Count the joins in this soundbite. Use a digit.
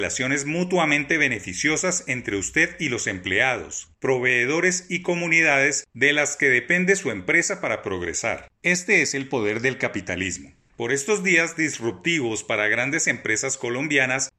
1